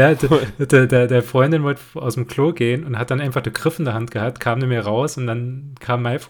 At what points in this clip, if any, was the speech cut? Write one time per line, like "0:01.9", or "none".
none